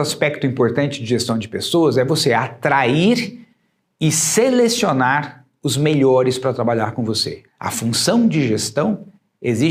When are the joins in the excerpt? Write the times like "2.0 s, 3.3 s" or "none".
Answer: 7.5 s

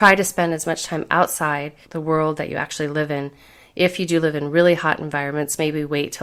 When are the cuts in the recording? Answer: 1.8 s

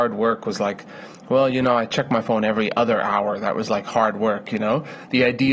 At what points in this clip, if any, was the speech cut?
none

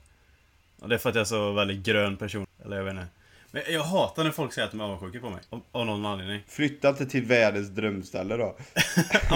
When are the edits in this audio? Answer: 2.4 s, 5.5 s

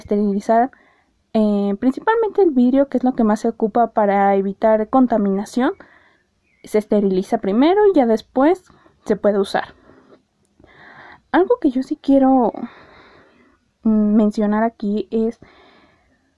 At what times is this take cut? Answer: none

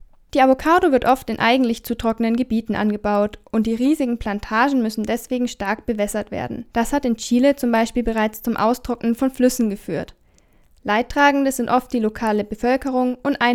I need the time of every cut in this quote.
6.7 s

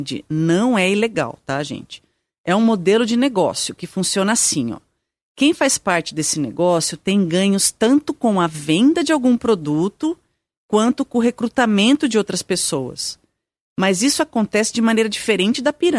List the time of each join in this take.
none

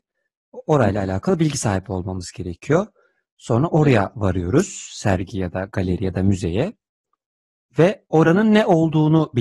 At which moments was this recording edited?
none

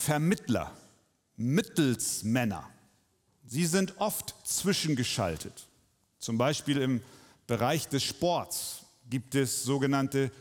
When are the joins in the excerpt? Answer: none

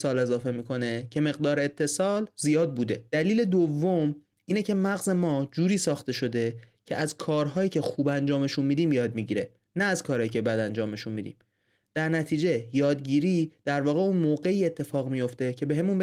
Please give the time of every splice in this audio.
3.1 s

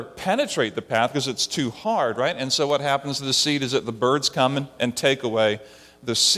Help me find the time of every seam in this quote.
none

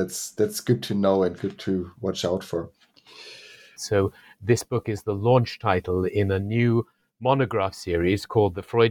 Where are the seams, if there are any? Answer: 3.8 s

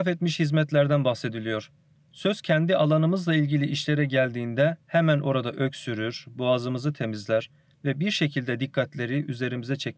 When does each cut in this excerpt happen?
none

